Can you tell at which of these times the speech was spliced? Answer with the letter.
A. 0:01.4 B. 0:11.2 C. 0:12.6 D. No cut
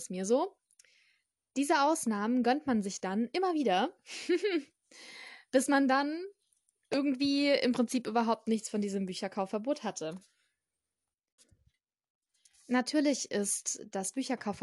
D